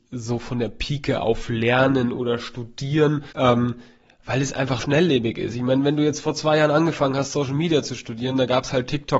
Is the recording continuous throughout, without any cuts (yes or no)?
no